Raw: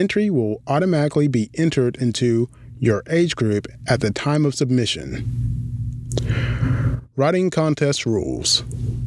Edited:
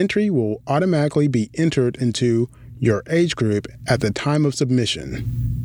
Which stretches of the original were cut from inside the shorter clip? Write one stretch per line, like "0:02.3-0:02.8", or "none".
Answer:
none